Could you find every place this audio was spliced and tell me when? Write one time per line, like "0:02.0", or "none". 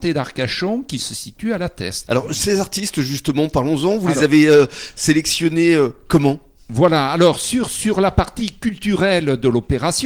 0:02.1